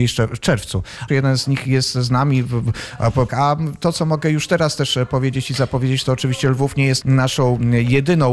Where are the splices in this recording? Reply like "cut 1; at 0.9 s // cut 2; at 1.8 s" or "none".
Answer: cut 1; at 1.1 s // cut 2; at 3.3 s // cut 3; at 7.0 s